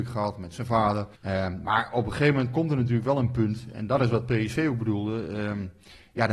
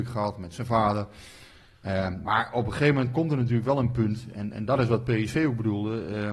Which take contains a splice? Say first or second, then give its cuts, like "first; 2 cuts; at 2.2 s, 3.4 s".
first; 2 cuts; at 1.2 s, 3.7 s